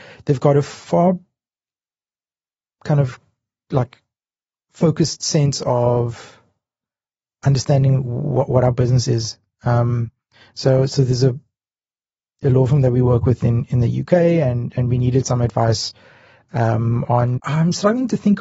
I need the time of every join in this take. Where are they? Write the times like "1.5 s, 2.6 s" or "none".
17.4 s